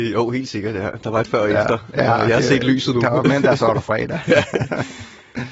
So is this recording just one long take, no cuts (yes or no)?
yes